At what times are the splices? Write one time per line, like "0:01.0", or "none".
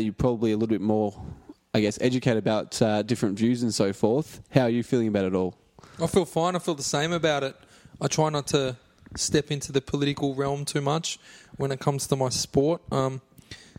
none